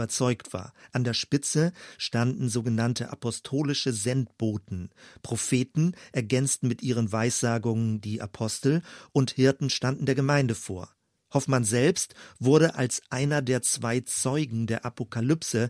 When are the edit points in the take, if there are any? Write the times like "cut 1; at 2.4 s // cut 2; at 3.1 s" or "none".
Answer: none

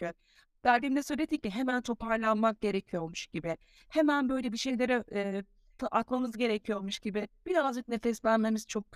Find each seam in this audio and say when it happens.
cut 1; at 5.8 s

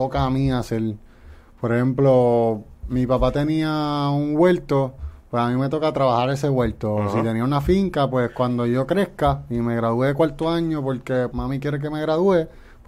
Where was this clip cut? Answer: cut 1; at 11.3 s

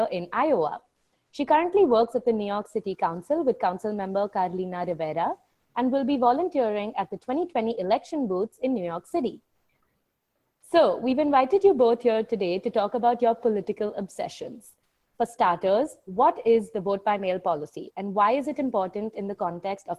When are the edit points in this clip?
none

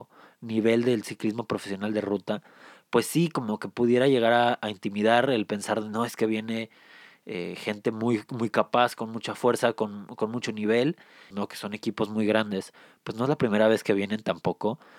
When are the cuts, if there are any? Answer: cut 1; at 11.3 s

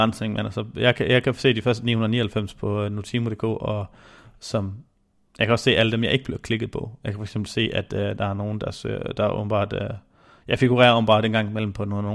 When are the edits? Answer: none

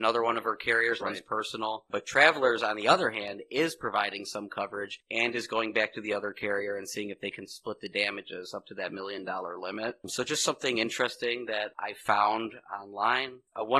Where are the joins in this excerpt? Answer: cut 1; at 1.0 s

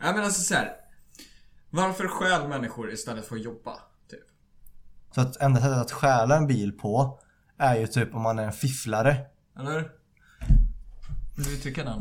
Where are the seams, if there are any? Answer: cut 1; at 5.1 s // cut 2; at 9.5 s

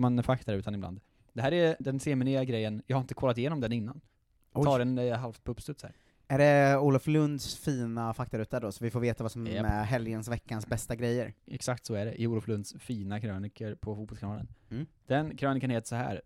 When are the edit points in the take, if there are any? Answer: cut 1; at 1.8 s

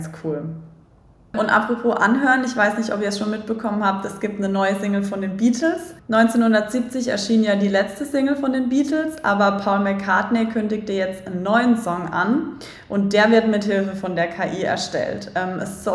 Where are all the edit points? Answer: none

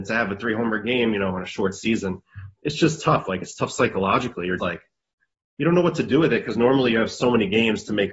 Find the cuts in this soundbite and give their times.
cut 1; at 4.6 s

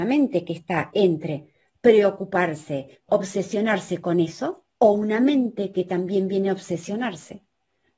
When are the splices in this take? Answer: cut 1; at 3.1 s // cut 2; at 4.7 s

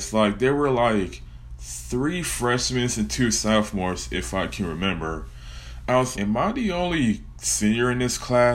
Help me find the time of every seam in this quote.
cut 1; at 6.1 s

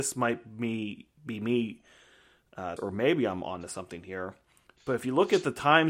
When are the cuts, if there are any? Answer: cut 1; at 2.8 s

